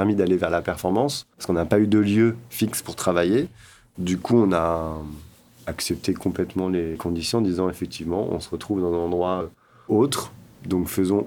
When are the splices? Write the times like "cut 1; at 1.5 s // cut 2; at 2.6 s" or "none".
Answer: none

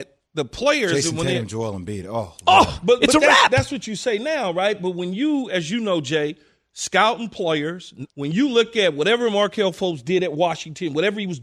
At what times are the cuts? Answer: cut 1; at 8.1 s

